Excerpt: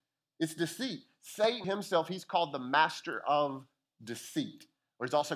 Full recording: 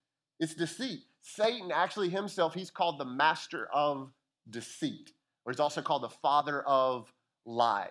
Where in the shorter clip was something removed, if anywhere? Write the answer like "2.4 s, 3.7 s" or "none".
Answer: 1.6 s